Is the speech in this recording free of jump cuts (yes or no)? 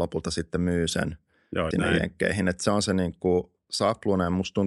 no